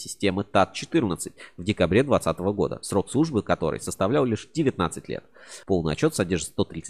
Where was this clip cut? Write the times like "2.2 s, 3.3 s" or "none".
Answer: 5.6 s